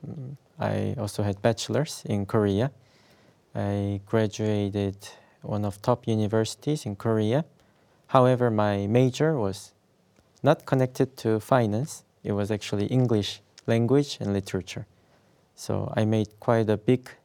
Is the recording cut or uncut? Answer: uncut